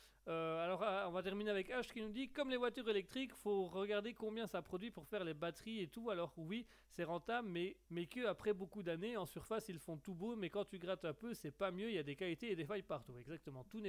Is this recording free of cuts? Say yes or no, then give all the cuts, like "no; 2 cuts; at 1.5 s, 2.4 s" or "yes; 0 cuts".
no; 1 cut; at 7.8 s